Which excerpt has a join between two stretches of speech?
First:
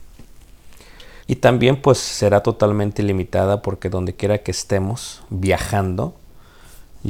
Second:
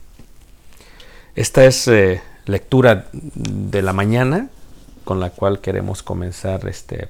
first; 1 cut; at 1.2 s

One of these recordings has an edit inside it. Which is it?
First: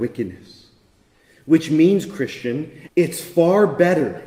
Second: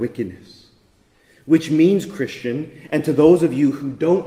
first; 1 cut; at 2.9 s

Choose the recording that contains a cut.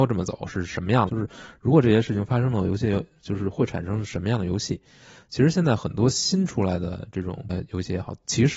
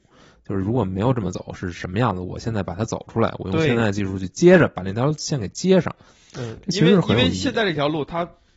first; 2 cuts; at 1.1 s, 7.5 s

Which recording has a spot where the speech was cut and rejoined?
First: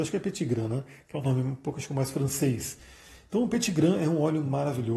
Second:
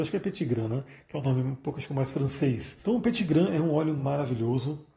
second; 1 cut; at 2.8 s

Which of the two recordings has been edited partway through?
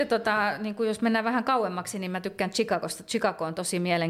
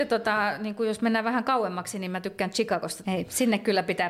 second; 1 cut; at 3.0 s

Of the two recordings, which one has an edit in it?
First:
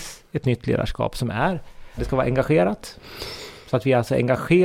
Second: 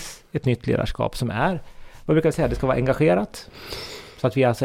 first; 1 cut; at 2.0 s

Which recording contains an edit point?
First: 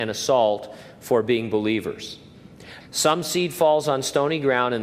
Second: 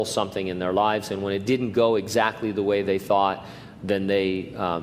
first; 1 cut; at 2.8 s

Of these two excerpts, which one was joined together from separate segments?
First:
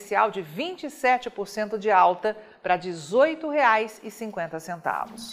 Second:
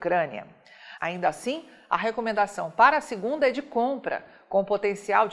second; 1 cut; at 1.0 s

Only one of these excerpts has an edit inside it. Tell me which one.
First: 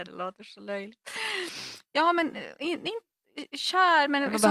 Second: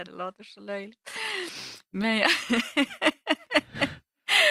first; 1 cut; at 1.9 s

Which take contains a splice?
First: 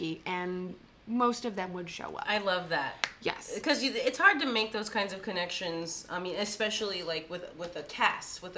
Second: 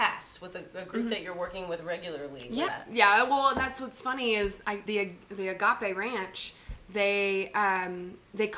second; 2 cuts; at 2.7 s, 4.9 s

